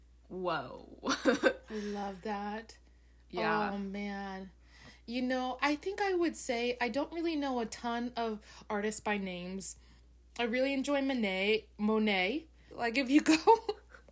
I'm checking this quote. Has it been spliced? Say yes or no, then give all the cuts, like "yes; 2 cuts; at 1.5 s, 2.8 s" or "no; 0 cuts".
yes; 1 cut; at 12.7 s